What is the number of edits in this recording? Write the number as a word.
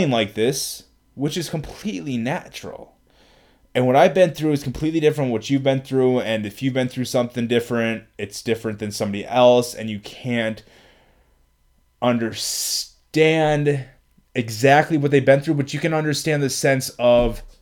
one